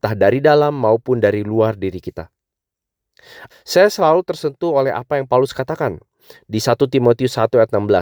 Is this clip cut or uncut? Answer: cut